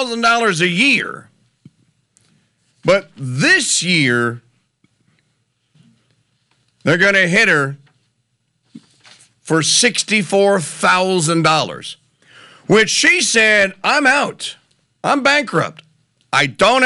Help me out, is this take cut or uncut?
uncut